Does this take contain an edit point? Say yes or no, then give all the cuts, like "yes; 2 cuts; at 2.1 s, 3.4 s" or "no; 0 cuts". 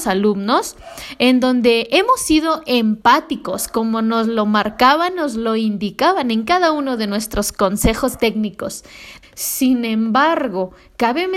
yes; 1 cut; at 9.2 s